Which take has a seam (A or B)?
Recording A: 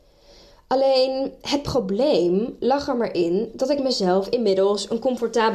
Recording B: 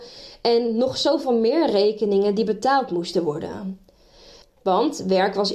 B